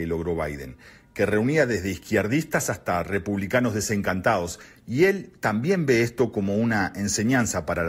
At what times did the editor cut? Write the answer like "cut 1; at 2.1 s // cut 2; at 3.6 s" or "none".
none